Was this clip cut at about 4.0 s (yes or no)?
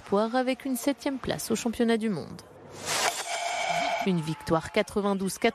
yes